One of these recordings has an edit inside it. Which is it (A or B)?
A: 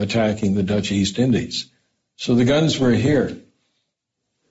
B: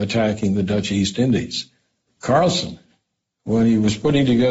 B